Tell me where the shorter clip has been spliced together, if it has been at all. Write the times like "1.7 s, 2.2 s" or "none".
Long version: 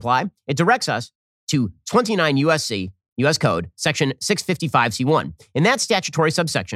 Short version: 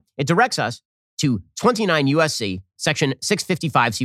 2.8 s